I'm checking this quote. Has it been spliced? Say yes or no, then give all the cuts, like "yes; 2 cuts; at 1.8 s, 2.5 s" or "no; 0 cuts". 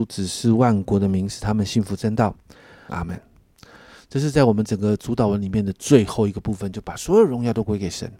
yes; 1 cut; at 2.9 s